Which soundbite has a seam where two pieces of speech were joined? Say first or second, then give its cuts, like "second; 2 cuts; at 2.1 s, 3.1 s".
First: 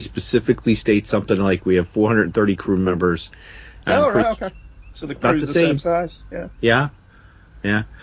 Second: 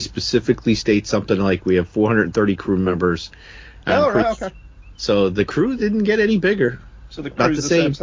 first; 1 cut; at 4.9 s